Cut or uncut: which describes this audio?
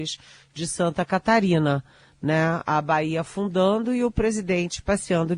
uncut